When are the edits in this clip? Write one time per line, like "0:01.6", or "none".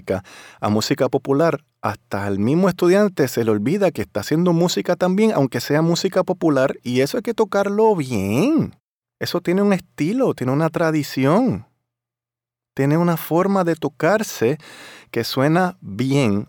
none